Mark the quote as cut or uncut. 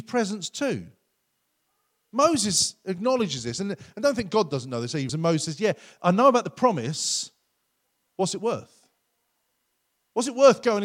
cut